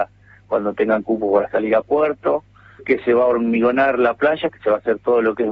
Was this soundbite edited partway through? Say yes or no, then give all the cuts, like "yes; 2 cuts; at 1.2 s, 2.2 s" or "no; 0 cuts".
yes; 1 cut; at 2.8 s